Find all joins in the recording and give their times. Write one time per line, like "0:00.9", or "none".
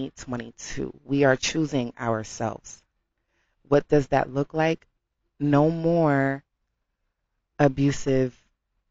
none